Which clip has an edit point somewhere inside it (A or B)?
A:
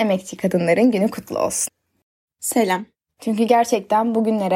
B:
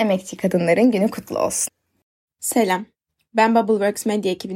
A